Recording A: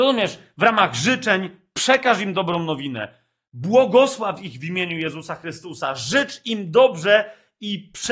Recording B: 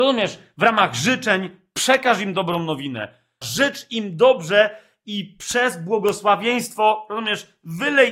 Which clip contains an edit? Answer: B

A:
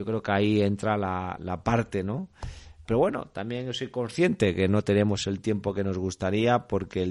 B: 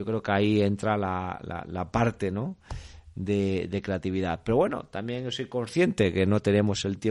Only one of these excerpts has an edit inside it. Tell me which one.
A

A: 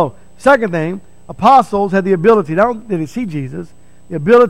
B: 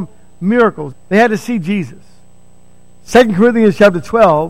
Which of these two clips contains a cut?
B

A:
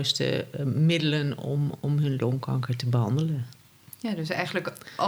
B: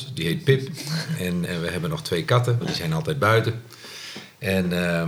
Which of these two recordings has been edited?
B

